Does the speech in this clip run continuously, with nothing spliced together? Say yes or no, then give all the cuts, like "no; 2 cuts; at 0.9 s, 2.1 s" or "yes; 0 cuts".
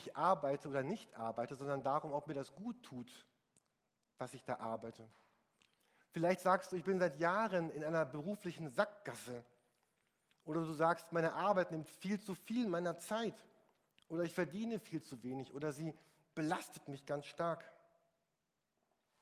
yes; 0 cuts